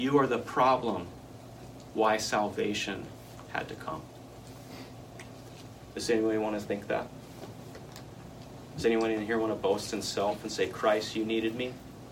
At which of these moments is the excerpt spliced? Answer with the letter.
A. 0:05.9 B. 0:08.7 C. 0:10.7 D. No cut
A